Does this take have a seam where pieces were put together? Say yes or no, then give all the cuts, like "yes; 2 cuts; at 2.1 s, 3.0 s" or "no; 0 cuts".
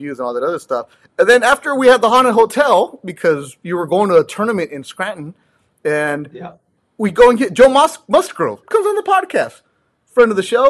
yes; 1 cut; at 8.6 s